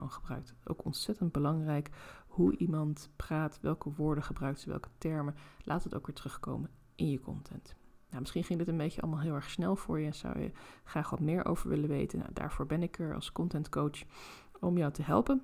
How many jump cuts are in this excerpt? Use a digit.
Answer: 0